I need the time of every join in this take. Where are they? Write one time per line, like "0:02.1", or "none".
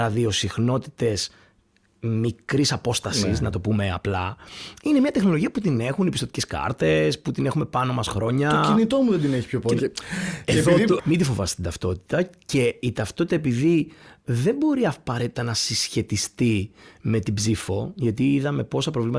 0:09.8
0:11.0